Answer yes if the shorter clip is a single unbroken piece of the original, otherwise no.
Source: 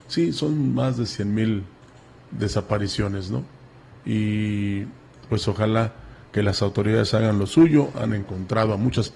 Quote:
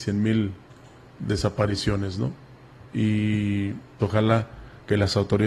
no